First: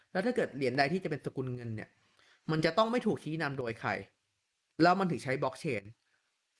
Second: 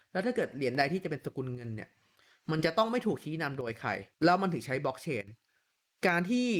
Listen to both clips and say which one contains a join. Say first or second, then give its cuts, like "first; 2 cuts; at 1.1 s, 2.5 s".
second; 1 cut; at 4.1 s